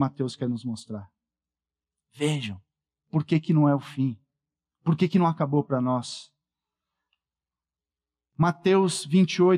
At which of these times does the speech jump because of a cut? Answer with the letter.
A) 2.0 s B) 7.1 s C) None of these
C